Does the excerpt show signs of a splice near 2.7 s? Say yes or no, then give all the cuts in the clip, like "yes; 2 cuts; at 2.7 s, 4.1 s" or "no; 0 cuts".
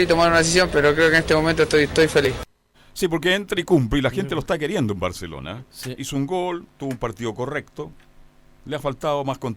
yes; 1 cut; at 2.7 s